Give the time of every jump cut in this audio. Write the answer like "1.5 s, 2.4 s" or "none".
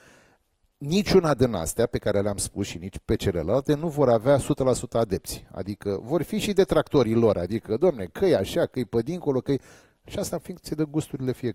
none